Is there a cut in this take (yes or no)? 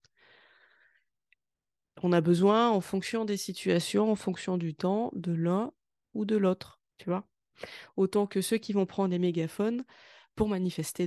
yes